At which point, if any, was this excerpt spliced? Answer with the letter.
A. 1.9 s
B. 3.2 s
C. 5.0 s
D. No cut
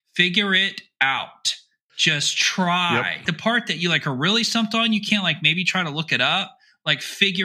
B